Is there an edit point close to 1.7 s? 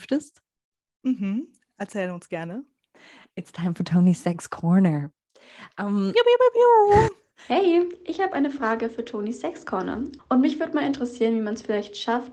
no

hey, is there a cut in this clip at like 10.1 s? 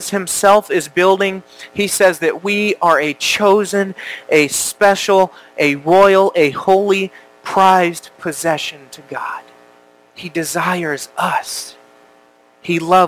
yes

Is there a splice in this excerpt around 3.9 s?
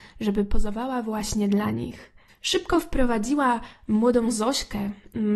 no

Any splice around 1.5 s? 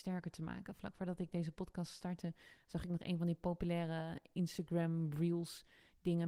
no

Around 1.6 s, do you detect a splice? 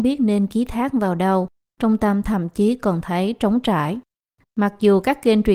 no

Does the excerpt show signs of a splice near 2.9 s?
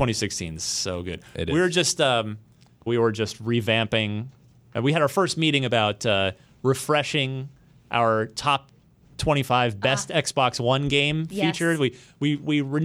yes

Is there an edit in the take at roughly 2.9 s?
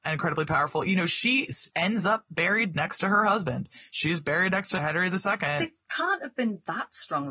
no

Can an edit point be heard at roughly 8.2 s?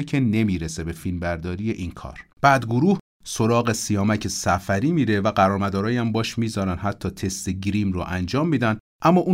no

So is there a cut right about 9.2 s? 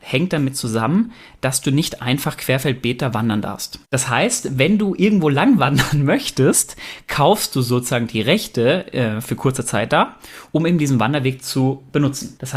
no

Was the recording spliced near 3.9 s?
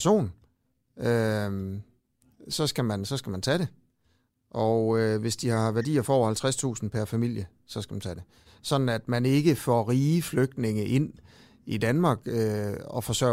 no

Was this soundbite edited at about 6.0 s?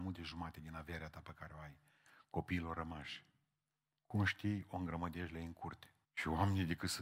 yes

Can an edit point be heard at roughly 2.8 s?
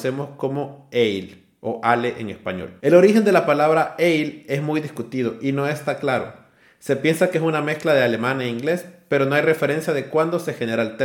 yes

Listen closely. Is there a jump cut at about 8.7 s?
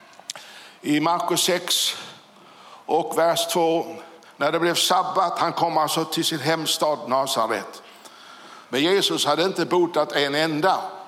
yes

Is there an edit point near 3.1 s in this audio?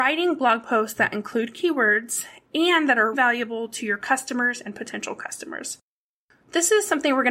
yes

